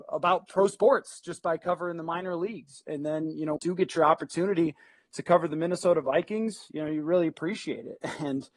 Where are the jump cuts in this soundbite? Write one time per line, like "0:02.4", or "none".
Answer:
0:03.6